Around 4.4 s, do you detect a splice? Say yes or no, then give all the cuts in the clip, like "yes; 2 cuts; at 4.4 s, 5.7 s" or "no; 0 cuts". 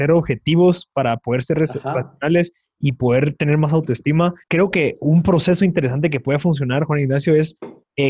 yes; 1 cut; at 4.4 s